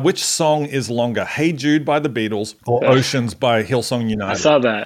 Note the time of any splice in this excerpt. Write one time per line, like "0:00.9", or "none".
0:02.6